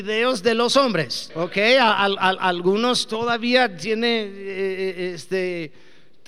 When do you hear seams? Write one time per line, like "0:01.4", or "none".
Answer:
0:01.3